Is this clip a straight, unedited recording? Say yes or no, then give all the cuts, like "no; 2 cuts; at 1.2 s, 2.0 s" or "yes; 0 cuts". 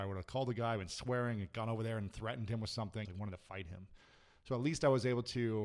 no; 1 cut; at 3.0 s